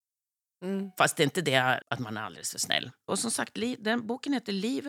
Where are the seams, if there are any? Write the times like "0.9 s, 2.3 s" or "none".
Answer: 1.8 s, 3.1 s